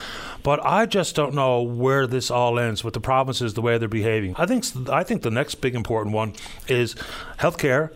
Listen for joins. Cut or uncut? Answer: cut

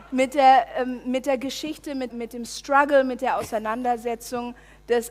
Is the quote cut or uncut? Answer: cut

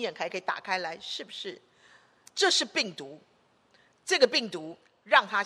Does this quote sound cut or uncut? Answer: cut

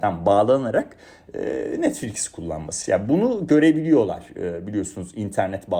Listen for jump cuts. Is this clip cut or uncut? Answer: uncut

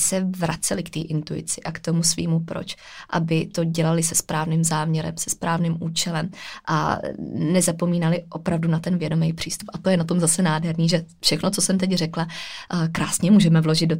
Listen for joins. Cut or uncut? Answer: uncut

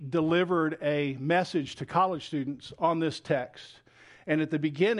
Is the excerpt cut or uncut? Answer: uncut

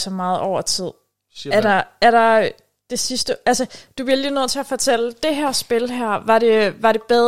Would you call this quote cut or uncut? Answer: uncut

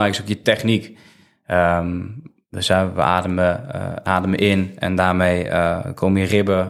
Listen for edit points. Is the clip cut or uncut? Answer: uncut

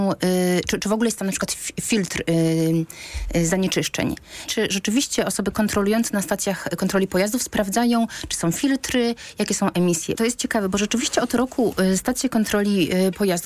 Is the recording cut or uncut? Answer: cut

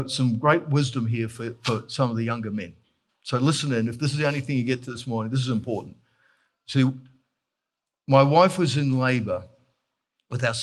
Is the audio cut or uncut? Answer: uncut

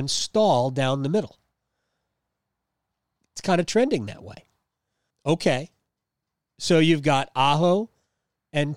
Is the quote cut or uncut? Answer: cut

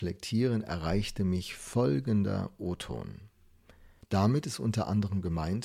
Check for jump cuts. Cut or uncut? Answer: cut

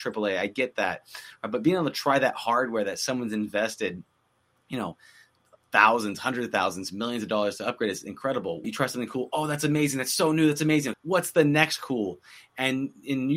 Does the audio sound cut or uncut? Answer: cut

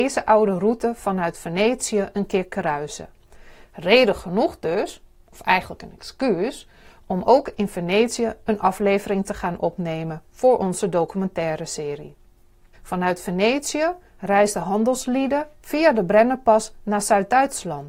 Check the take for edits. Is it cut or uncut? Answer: cut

